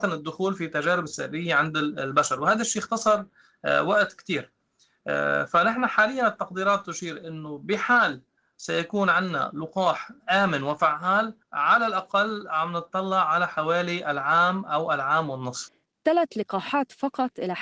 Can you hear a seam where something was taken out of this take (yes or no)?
yes